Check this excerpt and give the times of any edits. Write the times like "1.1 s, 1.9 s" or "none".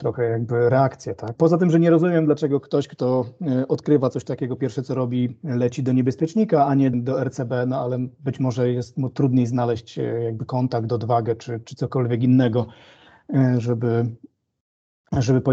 1.3 s, 6.9 s